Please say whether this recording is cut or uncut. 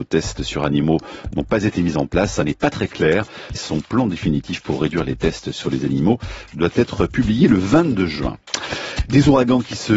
cut